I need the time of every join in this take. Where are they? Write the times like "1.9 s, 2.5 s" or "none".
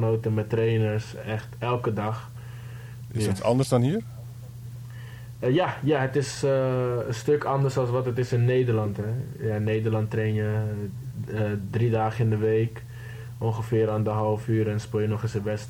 3.1 s